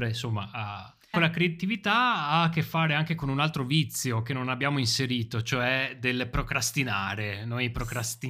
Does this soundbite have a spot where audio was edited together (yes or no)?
yes